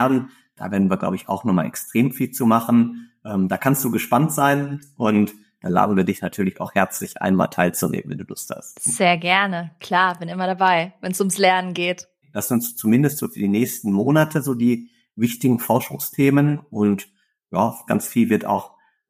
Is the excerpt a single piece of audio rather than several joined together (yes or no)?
no